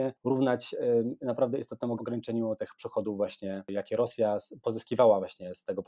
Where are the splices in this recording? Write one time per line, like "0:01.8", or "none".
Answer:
0:02.0